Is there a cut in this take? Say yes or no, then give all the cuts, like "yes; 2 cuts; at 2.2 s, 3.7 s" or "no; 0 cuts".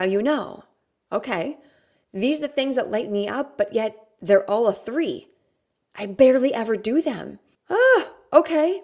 yes; 1 cut; at 7.5 s